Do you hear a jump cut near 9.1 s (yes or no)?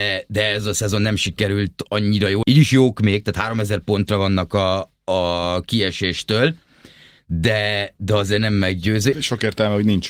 yes